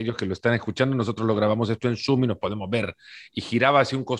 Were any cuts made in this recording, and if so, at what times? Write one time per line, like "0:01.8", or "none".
none